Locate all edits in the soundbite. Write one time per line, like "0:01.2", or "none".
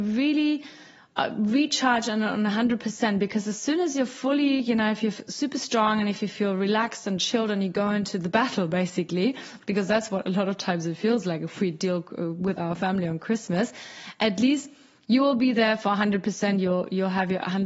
none